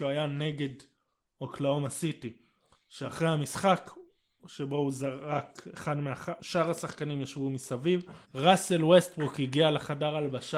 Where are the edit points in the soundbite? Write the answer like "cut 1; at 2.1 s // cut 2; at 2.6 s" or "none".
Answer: cut 1; at 6.4 s // cut 2; at 8.2 s